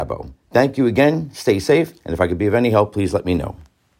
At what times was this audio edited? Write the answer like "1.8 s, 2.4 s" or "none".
none